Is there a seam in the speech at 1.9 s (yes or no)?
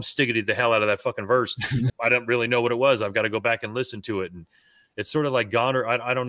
yes